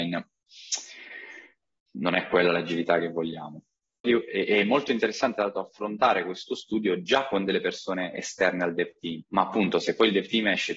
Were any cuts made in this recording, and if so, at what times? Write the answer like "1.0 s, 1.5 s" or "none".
4.0 s, 9.2 s